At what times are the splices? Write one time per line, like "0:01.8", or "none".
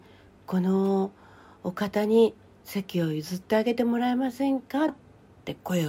0:04.9